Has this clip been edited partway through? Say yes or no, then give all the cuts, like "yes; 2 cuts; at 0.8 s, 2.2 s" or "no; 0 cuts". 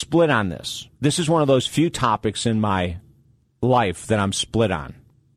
yes; 1 cut; at 0.9 s